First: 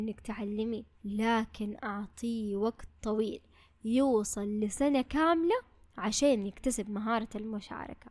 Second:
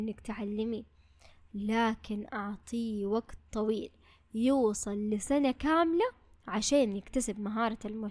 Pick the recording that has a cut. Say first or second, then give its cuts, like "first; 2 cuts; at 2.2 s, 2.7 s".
first; 1 cut; at 0.9 s